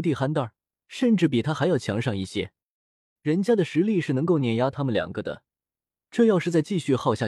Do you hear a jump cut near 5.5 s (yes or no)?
no